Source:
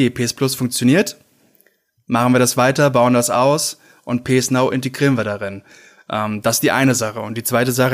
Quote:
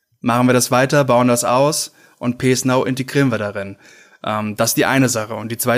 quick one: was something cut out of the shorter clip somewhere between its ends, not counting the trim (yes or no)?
no